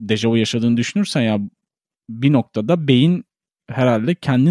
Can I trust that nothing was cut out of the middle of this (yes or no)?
yes